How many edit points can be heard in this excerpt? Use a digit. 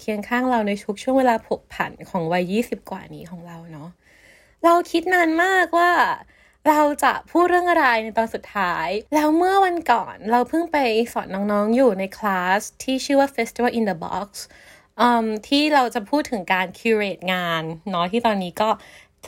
1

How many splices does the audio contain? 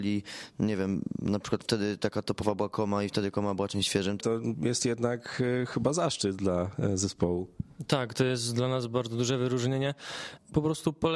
1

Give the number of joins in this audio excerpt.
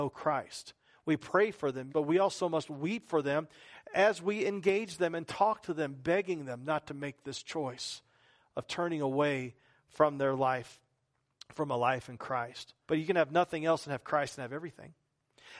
2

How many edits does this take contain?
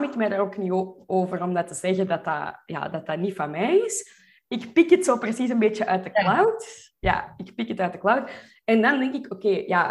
0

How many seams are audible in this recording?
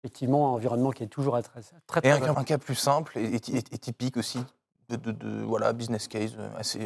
1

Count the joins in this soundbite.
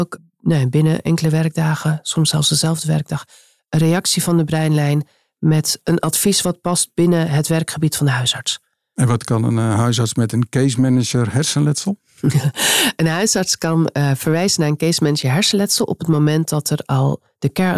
0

